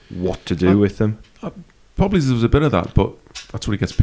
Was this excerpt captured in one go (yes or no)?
yes